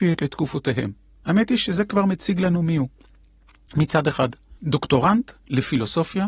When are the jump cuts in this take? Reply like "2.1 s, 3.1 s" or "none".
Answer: 4.6 s

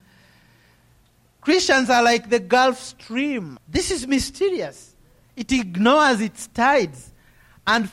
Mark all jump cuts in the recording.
3.6 s, 5.2 s

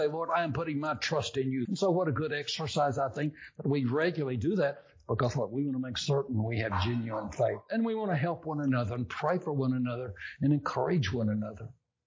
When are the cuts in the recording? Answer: 1.7 s

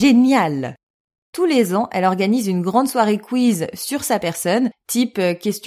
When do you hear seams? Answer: none

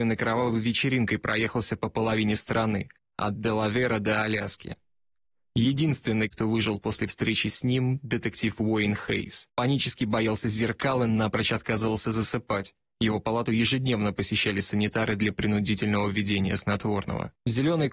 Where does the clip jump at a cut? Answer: 9.5 s

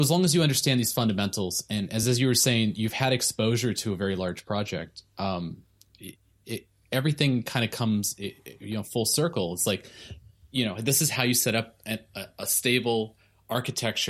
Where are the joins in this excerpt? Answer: none

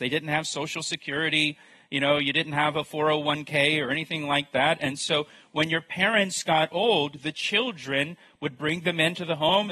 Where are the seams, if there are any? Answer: none

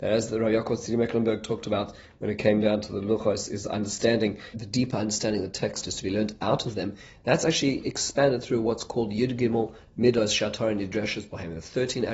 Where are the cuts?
4.5 s

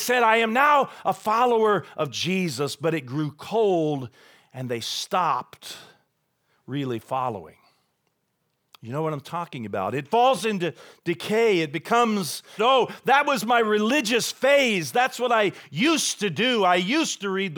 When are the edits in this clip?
12.6 s

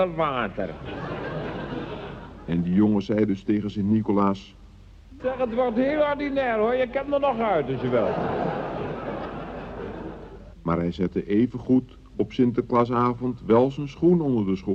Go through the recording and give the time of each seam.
5.2 s, 10.5 s

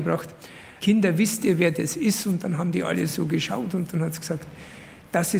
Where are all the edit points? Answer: none

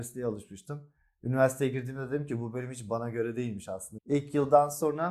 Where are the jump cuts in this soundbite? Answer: 4.0 s

